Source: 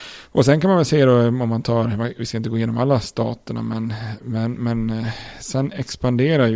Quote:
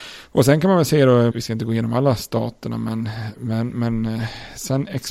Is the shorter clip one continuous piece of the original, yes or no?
no